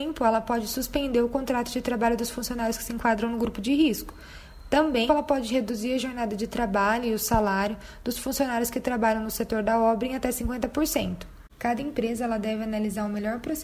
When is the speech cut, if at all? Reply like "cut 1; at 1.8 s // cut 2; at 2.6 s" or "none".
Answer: cut 1; at 5.1 s // cut 2; at 11.5 s

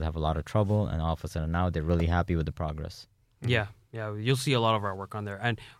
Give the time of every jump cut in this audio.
none

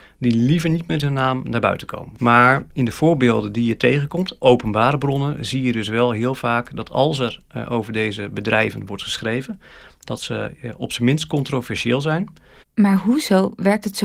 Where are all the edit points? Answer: cut 1; at 2.2 s // cut 2; at 12.6 s

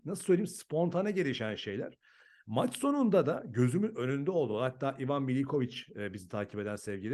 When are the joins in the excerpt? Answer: none

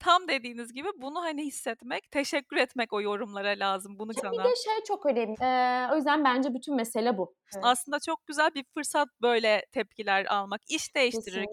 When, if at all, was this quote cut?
cut 1; at 4.2 s // cut 2; at 5.3 s // cut 3; at 7.5 s

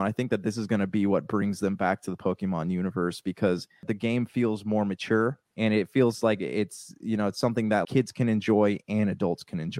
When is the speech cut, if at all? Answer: cut 1; at 5.5 s // cut 2; at 7.8 s

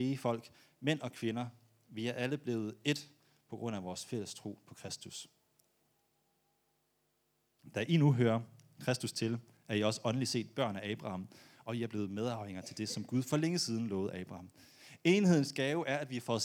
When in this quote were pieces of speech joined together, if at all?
none

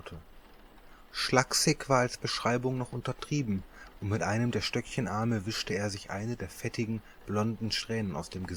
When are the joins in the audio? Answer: cut 1; at 1.1 s

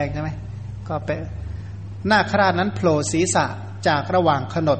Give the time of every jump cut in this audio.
none

